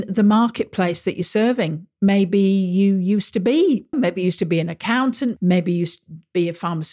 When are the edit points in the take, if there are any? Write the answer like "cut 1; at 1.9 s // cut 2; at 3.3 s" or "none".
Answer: cut 1; at 3.9 s // cut 2; at 5.4 s